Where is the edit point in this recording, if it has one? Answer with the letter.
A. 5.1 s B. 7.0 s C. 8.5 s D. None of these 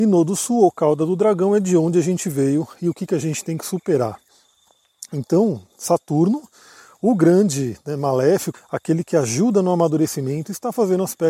C